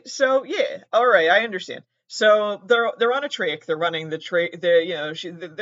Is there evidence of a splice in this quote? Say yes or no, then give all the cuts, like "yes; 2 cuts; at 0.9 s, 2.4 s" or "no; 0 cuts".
no; 0 cuts